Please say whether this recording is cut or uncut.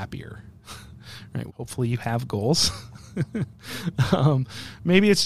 cut